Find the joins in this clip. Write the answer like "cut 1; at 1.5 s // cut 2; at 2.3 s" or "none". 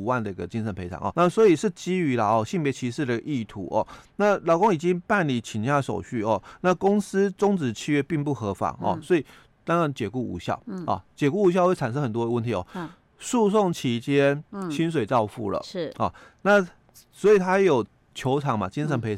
cut 1; at 1.1 s